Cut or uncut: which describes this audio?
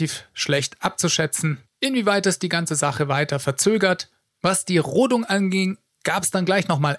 cut